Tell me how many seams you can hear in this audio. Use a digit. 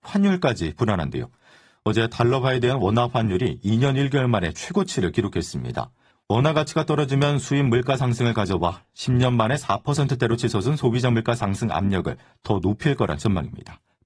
0